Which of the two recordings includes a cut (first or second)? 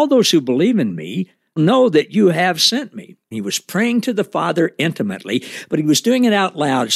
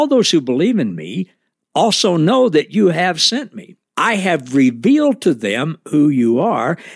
first